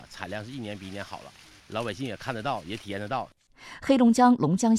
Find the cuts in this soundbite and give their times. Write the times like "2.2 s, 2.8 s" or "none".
none